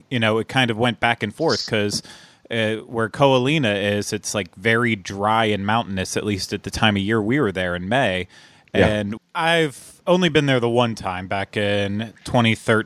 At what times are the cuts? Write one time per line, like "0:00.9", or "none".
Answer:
0:09.2